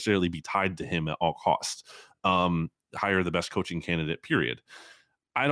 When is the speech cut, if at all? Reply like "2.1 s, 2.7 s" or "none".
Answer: none